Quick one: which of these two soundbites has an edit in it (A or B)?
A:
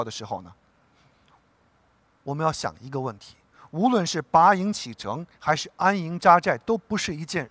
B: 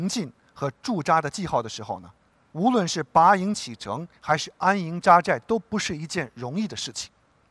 B